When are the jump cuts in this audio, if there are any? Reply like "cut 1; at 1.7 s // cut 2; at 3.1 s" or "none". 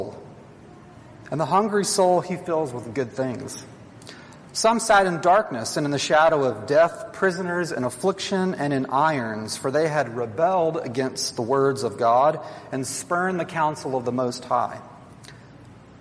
none